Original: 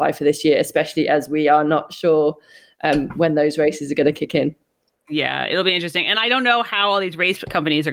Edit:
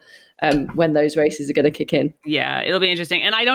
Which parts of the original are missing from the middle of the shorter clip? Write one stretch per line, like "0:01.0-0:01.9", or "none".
0:04.6-0:05.0